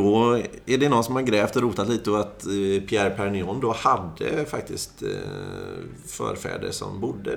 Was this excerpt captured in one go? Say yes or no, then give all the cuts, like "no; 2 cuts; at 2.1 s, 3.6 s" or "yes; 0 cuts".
yes; 0 cuts